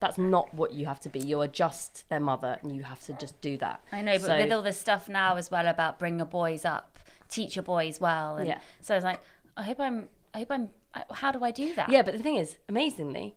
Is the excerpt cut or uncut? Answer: uncut